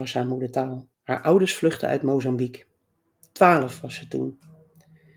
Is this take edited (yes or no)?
yes